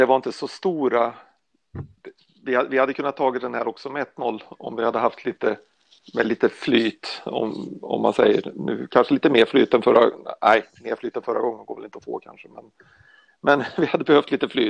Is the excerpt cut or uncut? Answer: uncut